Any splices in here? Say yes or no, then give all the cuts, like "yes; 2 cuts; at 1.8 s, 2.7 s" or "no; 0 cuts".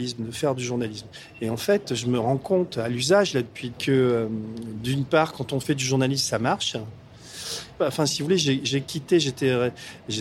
yes; 2 cuts; at 3.7 s, 7.8 s